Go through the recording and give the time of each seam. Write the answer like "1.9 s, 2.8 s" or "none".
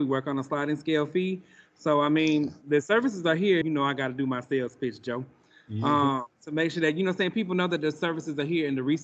3.6 s